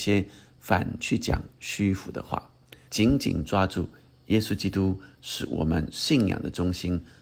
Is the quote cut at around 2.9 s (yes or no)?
yes